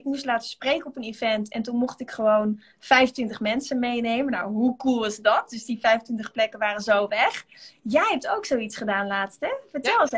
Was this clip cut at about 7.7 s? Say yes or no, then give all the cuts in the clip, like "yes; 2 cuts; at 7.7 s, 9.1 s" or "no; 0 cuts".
no; 0 cuts